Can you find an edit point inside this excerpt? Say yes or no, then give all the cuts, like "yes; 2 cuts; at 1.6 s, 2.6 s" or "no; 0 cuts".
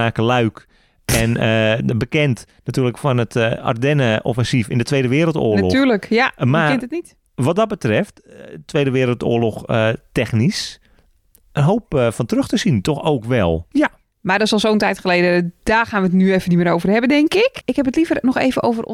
yes; 2 cuts; at 13.7 s, 17.6 s